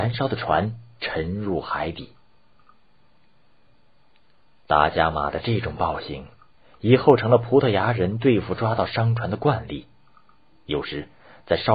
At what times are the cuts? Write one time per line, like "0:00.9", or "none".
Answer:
none